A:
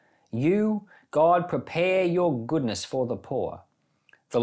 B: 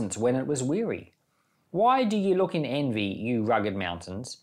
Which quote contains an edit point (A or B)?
B